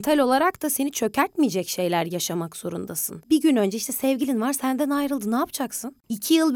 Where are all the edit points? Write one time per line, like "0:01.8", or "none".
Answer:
0:03.2